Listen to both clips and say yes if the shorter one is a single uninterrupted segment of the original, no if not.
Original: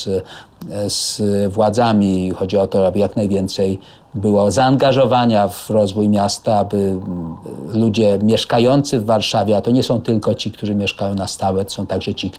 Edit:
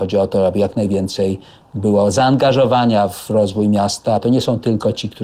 no